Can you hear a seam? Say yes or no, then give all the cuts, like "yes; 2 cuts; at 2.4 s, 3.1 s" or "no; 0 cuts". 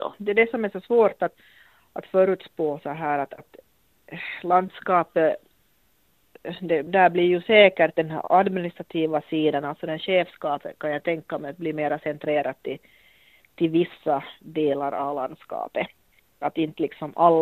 no; 0 cuts